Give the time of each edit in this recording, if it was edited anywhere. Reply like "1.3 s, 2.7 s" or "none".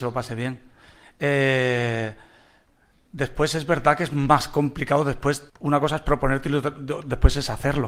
5.5 s